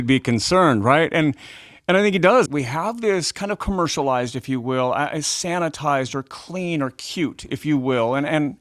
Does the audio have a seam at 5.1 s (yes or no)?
no